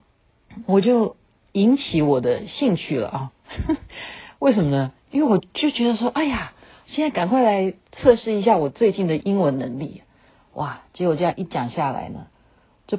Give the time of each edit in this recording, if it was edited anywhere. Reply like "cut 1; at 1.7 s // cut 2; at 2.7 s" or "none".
cut 1; at 6.9 s